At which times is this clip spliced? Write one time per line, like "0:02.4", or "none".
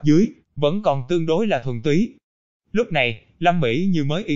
none